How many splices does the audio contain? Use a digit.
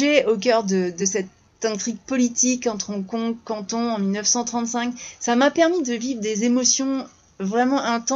0